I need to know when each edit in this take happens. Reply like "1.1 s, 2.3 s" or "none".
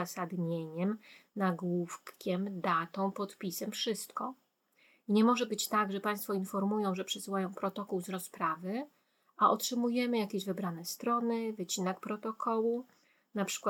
none